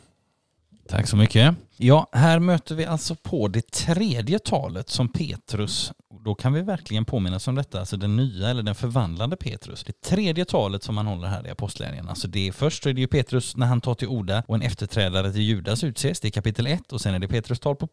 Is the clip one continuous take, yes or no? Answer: yes